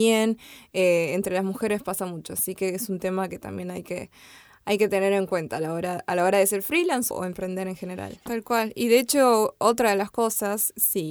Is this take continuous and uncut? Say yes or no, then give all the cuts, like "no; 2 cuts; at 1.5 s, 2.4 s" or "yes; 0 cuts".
no; 2 cuts; at 7.1 s, 8.3 s